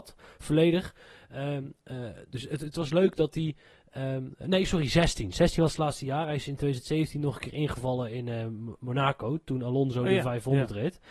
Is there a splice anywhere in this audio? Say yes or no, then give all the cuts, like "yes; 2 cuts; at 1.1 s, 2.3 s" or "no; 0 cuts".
no; 0 cuts